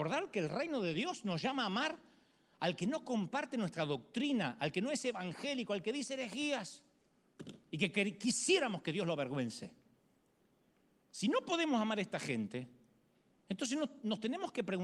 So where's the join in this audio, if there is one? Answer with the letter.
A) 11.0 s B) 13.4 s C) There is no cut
C